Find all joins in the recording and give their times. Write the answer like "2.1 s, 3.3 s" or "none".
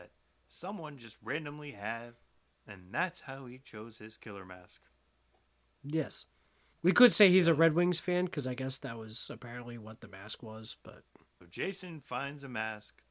11.3 s